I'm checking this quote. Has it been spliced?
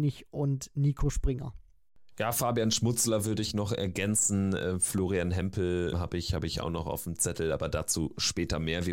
yes; 1 cut; at 5.9 s

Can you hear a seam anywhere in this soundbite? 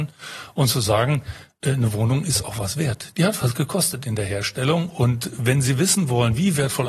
no; 0 cuts

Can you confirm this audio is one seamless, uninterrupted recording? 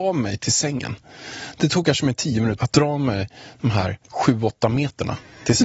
no; 2 cuts; at 2.6 s, 4.0 s

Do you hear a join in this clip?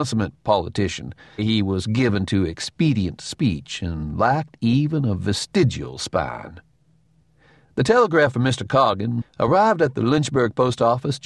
yes; 2 cuts; at 1.4 s, 9.2 s

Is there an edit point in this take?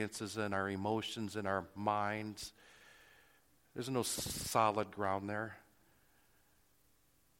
no; 0 cuts

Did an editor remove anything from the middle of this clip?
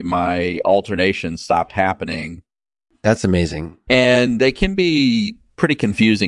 yes; 1 cut; at 3.9 s

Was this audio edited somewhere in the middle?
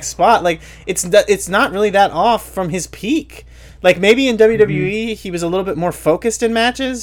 no; 0 cuts

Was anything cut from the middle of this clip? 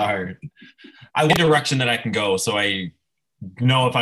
yes; 1 cut; at 1.1 s

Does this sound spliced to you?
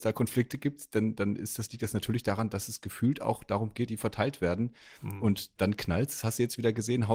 yes; 1 cut; at 3.9 s

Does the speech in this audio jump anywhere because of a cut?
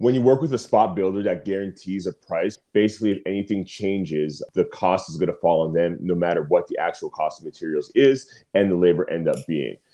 no; 0 cuts

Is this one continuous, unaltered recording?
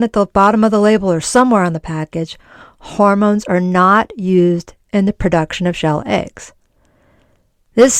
yes; 0 cuts

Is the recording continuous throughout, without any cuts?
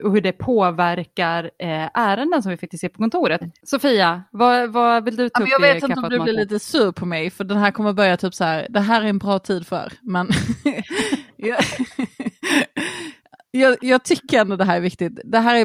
no; 1 cut; at 3.4 s

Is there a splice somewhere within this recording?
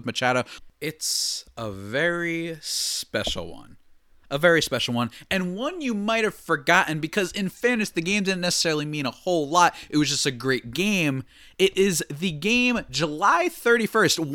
no; 0 cuts

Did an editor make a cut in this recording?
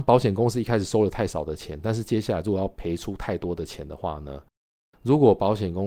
no; 0 cuts

